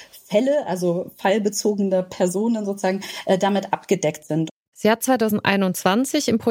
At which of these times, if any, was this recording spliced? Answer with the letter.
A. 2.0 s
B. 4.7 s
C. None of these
B